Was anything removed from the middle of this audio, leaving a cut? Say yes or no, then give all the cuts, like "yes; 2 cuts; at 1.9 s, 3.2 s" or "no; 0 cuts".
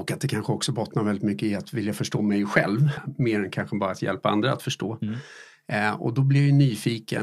yes; 1 cut; at 3.0 s